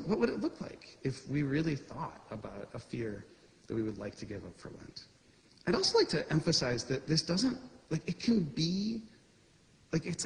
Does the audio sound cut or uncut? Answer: uncut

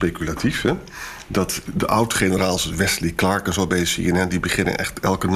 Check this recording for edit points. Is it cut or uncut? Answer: cut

